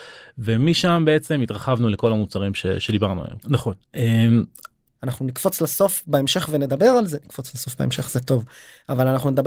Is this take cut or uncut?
cut